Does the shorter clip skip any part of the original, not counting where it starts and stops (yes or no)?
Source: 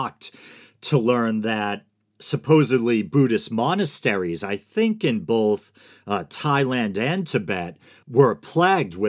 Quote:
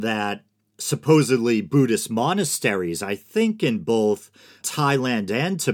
yes